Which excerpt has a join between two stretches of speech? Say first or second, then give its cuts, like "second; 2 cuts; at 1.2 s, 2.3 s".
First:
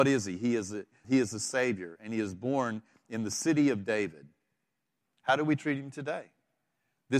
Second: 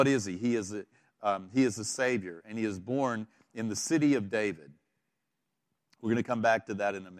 first; 2 cuts; at 1.0 s, 5.0 s